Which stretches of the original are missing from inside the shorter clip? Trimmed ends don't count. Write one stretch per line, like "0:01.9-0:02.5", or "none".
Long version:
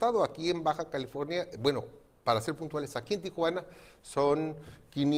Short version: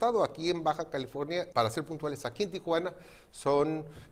0:01.5-0:02.2